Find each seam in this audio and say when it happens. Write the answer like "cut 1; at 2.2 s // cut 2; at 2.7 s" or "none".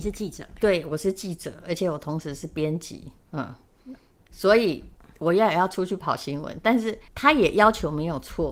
cut 1; at 7.1 s